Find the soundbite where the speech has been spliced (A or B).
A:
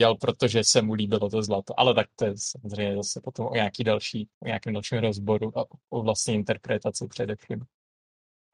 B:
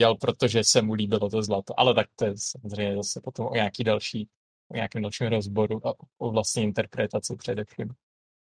A